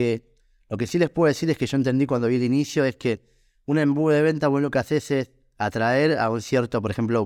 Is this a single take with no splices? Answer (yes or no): yes